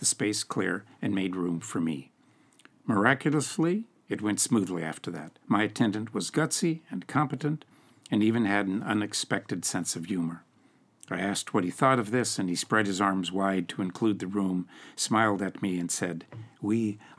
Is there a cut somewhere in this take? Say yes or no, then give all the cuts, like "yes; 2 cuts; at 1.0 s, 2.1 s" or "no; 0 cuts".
yes; 1 cut; at 5.4 s